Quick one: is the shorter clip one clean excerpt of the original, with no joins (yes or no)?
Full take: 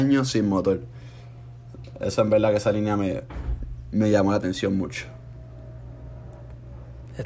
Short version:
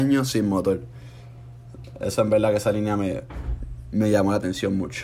yes